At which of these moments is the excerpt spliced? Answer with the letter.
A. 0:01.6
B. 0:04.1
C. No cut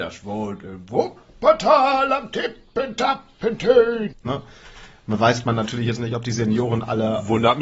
B